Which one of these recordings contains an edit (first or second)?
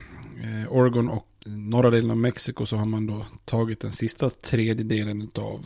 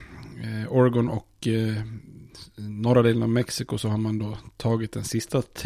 first